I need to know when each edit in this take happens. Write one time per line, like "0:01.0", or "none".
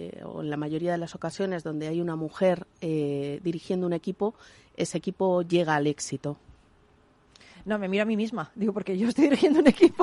none